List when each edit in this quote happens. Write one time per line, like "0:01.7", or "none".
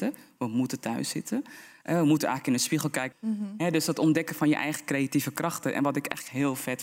0:03.1